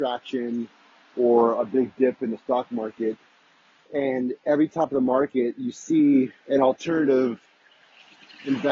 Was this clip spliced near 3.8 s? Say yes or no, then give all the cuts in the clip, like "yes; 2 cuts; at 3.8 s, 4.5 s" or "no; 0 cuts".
yes; 2 cuts; at 3.8 s, 6.4 s